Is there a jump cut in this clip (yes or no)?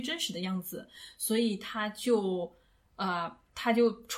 no